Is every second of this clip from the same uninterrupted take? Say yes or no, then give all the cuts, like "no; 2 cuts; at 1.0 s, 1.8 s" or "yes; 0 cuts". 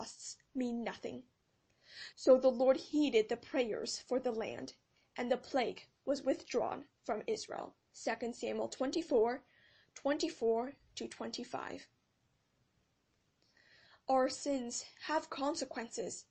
no; 2 cuts; at 2.1 s, 7.8 s